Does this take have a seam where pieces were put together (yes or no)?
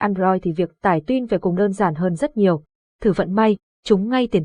yes